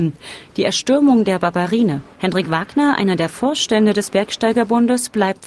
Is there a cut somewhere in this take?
yes; 1 cut; at 2.1 s

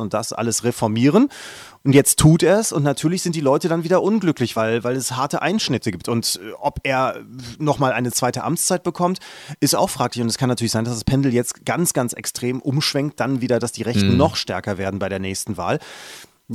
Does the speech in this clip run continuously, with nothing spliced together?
yes; 0 cuts

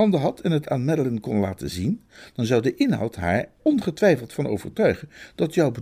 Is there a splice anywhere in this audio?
yes; 1 cut; at 3.6 s

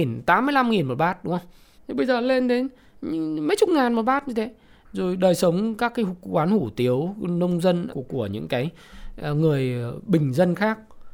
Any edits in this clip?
yes; 2 cuts; at 1.7 s, 7.9 s

